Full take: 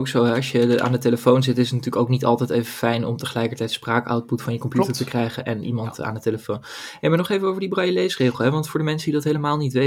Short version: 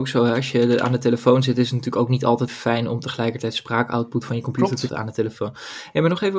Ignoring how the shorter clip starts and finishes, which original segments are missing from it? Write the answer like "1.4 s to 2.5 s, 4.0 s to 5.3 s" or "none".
2.5 s to 2.6 s, 5.1 s to 6.0 s